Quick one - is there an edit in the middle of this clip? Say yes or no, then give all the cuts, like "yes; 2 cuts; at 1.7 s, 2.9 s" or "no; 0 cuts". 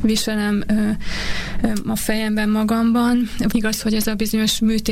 yes; 1 cut; at 3.5 s